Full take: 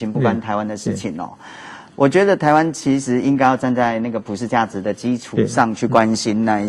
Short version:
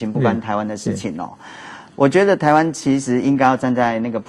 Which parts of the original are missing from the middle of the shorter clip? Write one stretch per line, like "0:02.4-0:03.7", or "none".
none

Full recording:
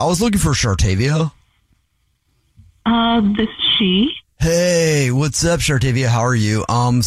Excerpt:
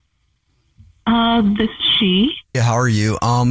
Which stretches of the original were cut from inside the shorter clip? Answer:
0:04.3-0:06.0

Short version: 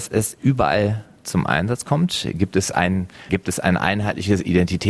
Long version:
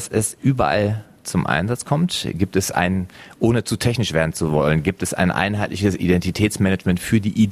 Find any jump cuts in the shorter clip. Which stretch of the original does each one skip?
0:03.3-0:04.8

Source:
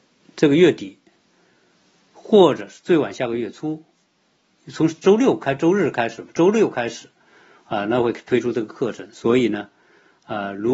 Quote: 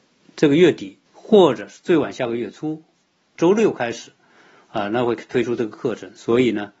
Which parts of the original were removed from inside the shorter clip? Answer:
0:01.1-0:02.1
0:04.4-0:06.3

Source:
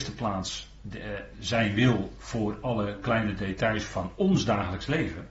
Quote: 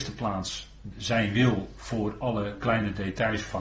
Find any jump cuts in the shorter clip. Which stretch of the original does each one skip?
0:00.9-0:01.3

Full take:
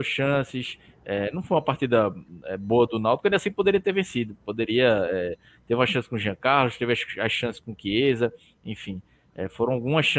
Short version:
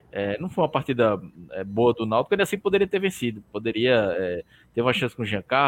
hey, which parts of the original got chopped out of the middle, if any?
none

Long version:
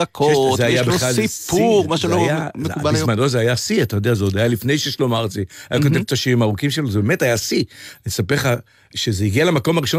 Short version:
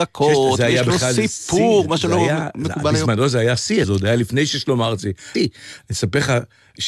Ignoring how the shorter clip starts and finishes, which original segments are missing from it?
0:03.8-0:04.2
0:05.7-0:07.5

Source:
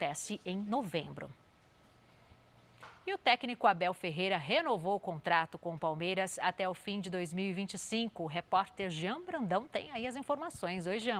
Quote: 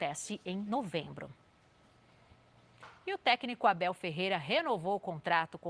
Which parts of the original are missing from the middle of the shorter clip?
none

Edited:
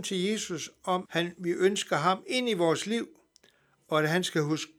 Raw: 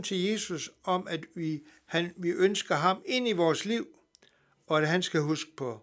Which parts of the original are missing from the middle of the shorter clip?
0:01.0-0:01.8

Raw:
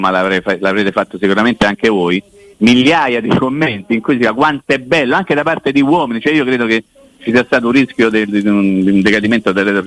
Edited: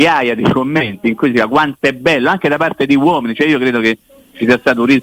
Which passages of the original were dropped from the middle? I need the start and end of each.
none

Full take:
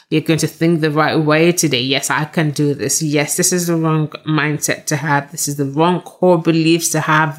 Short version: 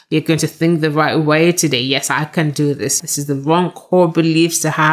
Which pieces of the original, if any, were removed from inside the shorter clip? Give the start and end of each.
0:03.0-0:05.3

